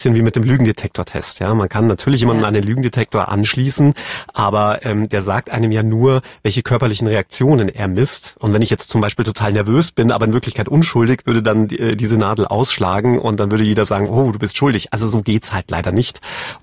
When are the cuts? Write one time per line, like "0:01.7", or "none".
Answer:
none